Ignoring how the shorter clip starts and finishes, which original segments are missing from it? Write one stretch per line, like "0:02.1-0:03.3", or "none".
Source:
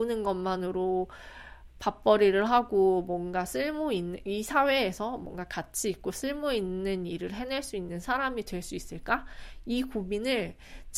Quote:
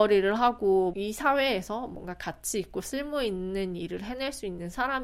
0:03.0-0:04.2

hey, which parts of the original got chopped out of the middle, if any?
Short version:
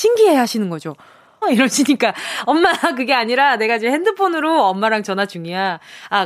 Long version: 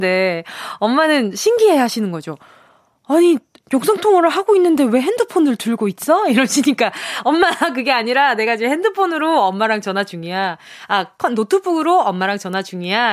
0:02.8-0:06.2

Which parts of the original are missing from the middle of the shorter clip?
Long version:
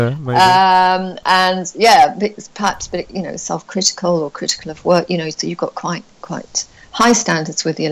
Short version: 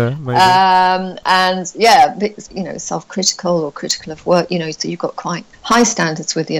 0:02.5-0:03.1
0:06.1-0:06.8

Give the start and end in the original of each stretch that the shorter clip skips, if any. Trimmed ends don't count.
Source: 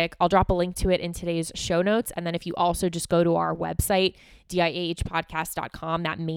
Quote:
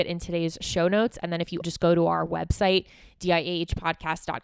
0:02.5-0:02.9

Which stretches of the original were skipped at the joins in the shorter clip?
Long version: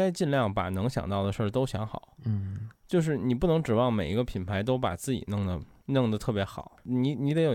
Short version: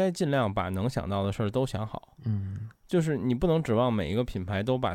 none

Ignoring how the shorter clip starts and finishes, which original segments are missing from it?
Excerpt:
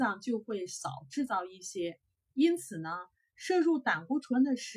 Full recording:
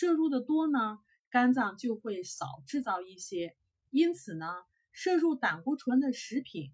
none

